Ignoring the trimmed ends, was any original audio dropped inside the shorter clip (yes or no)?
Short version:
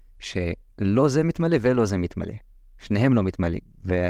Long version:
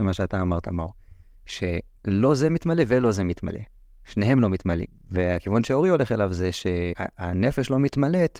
no